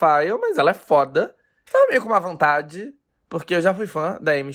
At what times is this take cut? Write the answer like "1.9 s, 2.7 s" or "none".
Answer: 1.6 s